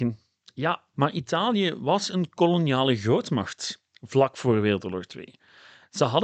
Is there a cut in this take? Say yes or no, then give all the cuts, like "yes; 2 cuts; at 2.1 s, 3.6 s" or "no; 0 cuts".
yes; 1 cut; at 0.9 s